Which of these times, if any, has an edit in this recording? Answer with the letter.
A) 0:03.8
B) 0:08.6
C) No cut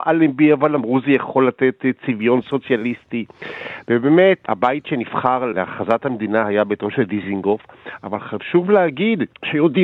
A